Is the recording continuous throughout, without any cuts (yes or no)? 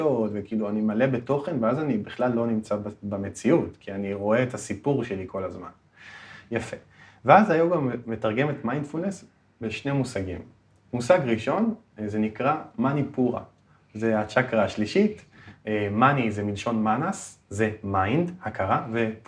yes